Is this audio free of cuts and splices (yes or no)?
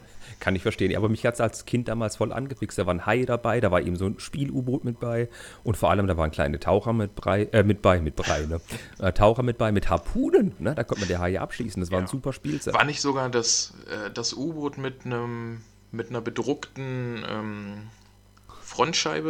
yes